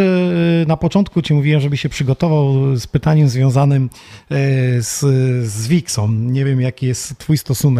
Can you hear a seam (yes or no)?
no